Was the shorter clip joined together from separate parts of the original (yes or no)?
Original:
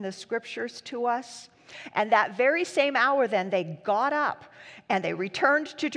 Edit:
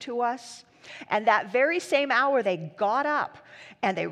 yes